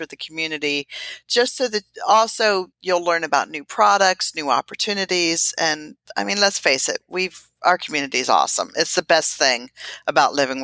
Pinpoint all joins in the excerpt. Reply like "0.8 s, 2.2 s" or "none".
2.7 s